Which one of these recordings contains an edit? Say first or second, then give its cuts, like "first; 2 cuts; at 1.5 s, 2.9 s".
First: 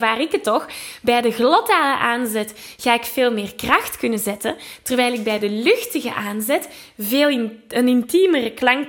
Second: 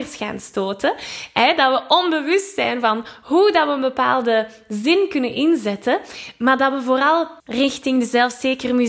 second; 1 cut; at 7.4 s